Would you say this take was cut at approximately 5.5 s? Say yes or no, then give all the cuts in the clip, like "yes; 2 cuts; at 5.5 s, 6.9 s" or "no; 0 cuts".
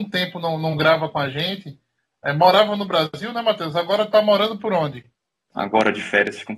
yes; 1 cut; at 5.5 s